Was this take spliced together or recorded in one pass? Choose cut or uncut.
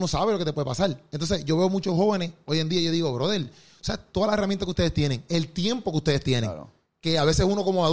uncut